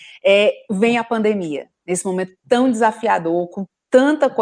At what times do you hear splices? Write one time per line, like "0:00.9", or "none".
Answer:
none